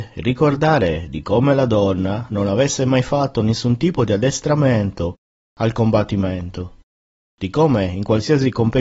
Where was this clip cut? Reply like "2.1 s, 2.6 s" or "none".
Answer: none